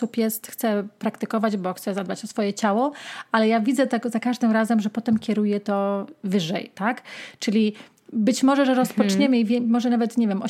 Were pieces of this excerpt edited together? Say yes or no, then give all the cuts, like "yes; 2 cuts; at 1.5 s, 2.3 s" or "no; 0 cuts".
no; 0 cuts